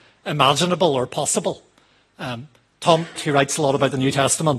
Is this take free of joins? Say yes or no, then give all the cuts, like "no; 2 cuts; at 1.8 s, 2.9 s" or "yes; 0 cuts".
no; 1 cut; at 3.2 s